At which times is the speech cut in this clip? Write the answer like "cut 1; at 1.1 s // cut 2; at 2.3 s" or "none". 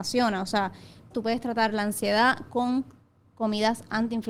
cut 1; at 1.1 s